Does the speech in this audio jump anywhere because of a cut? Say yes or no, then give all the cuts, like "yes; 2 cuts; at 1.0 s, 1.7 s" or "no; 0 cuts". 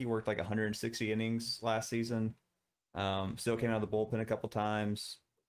no; 0 cuts